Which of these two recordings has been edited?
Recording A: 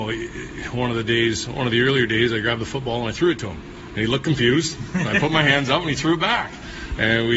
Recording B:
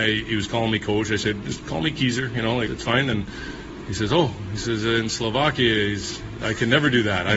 B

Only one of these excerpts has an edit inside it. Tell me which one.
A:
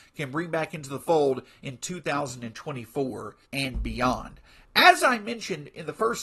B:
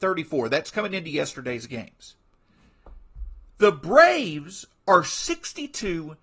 A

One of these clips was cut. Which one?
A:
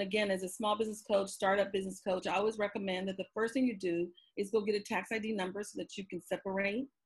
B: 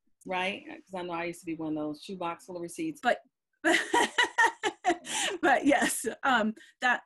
B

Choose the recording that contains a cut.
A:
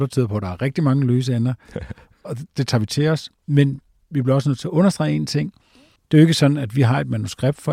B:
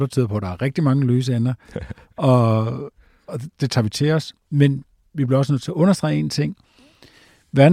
A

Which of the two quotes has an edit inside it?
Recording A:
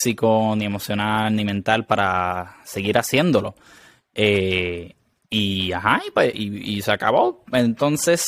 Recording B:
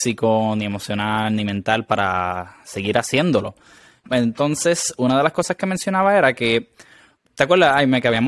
B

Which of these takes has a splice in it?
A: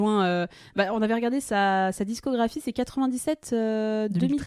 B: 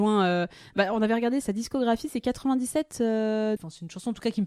B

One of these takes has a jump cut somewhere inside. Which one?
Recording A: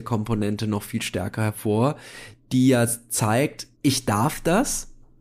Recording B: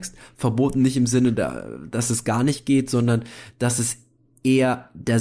A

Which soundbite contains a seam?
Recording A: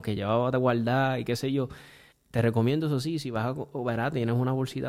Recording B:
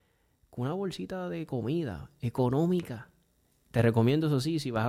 A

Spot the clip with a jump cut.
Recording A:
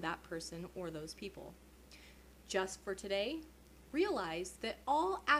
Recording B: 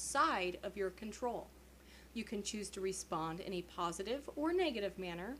B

